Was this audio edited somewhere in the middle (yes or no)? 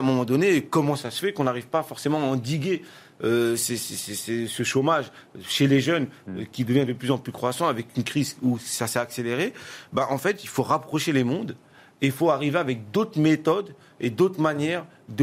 no